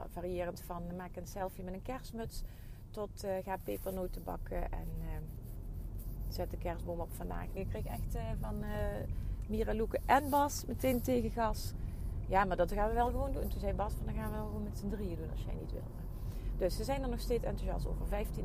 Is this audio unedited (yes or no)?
no